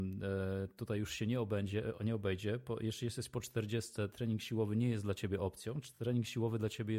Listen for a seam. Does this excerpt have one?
no; 0 cuts

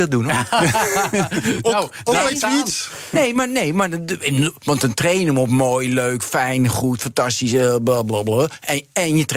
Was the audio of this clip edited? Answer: no; 0 cuts

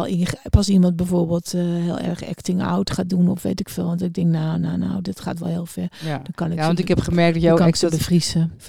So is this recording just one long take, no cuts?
yes; 0 cuts

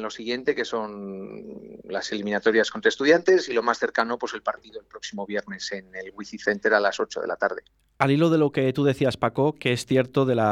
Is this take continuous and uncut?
yes; 0 cuts

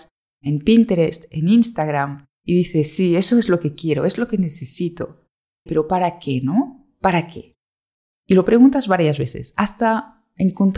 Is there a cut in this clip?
yes; 1 cut; at 5.7 s

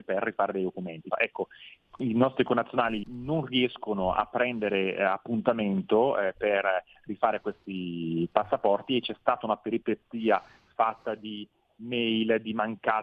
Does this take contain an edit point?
yes; 2 cuts; at 1.1 s, 3.0 s

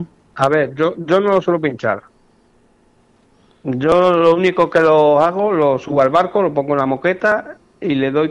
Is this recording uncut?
yes; 0 cuts

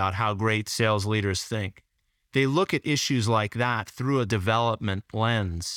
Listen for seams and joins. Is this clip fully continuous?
yes; 0 cuts

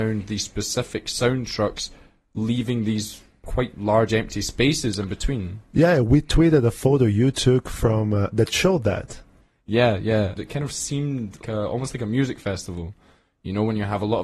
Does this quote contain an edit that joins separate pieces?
yes; 3 cuts; at 8.3 s, 10.4 s, 11.4 s

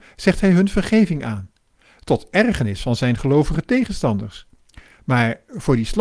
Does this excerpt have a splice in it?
no; 0 cuts

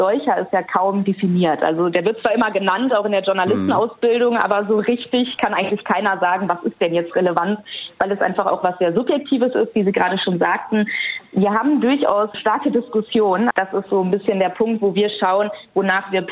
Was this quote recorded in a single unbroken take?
no; 1 cut; at 13.5 s

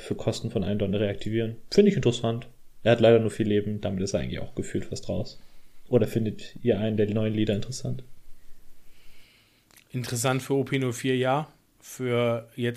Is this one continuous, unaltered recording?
yes; 0 cuts

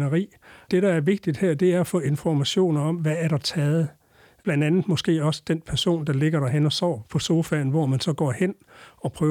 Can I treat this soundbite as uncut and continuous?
yes; 0 cuts

